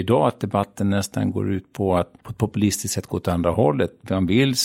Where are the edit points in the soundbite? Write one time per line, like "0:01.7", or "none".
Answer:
0:02.2